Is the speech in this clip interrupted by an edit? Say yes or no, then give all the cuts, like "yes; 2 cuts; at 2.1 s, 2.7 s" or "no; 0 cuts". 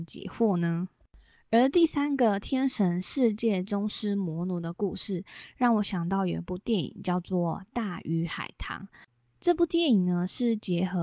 no; 0 cuts